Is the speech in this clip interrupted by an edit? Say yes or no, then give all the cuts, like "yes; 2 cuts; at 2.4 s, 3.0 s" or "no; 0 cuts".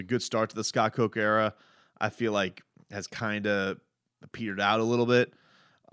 no; 0 cuts